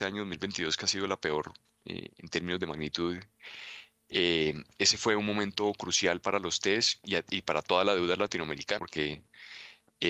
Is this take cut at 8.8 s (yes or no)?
yes